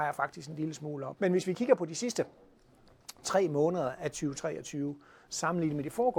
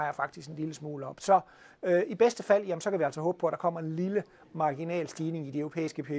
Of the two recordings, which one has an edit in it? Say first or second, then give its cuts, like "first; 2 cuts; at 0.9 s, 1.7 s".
first; 1 cut; at 1.2 s